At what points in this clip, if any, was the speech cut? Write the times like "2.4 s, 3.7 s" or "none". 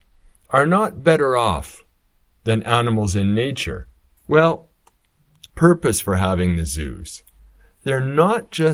4.2 s, 5.5 s